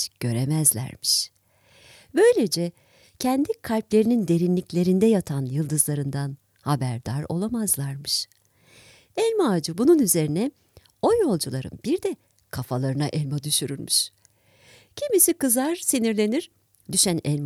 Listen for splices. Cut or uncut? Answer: uncut